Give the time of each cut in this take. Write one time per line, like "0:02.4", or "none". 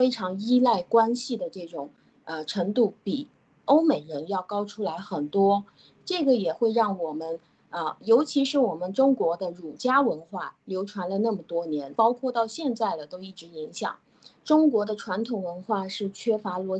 0:11.9
0:14.3